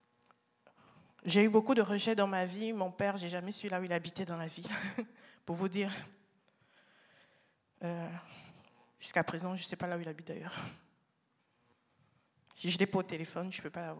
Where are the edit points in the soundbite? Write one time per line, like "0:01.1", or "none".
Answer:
none